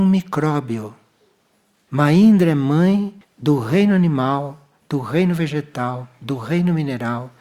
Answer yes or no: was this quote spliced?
no